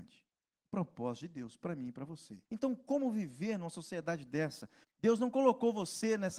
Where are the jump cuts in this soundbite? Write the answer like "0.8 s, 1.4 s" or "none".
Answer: 2.4 s, 4.8 s